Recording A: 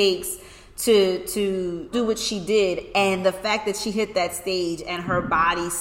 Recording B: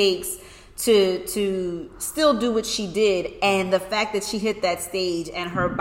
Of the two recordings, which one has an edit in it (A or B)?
A